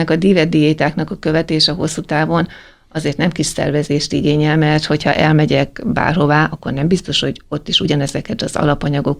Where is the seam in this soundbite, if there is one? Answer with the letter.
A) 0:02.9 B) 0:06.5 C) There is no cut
C